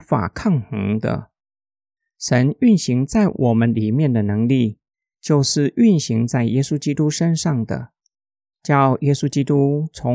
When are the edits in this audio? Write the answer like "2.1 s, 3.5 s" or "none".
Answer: none